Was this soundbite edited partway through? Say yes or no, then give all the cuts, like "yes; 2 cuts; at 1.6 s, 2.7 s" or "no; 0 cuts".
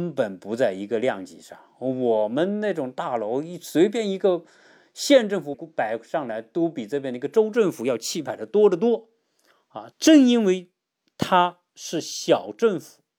yes; 2 cuts; at 5.5 s, 9.9 s